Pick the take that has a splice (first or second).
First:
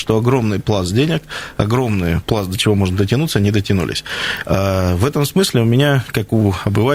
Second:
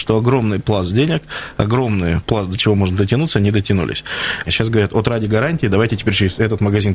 second